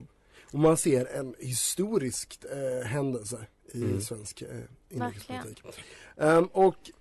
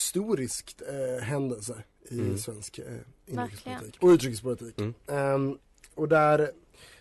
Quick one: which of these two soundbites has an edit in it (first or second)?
second